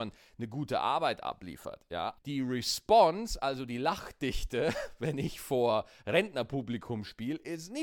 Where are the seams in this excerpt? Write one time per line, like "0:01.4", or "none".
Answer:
0:02.2